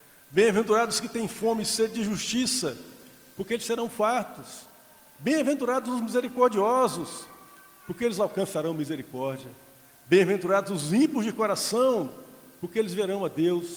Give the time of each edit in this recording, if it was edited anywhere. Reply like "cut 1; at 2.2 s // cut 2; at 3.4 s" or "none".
none